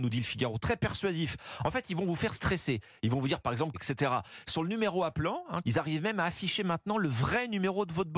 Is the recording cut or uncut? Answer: cut